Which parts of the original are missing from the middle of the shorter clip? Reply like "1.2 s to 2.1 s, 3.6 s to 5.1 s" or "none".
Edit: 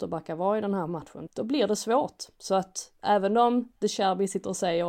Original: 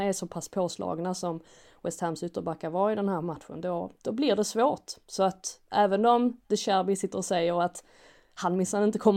3.6 s to 4.0 s